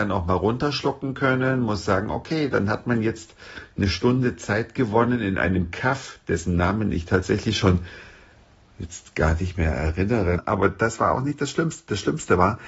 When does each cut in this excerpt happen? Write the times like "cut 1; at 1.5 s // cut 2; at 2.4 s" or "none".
cut 1; at 10.4 s